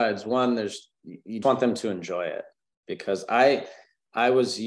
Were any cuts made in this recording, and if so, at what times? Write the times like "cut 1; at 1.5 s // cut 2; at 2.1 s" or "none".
cut 1; at 1.4 s